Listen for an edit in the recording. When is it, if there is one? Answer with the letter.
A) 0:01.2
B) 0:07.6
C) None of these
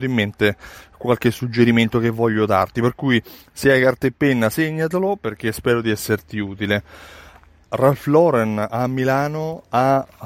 B